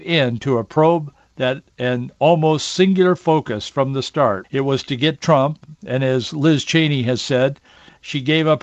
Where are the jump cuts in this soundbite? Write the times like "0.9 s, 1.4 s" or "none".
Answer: 4.4 s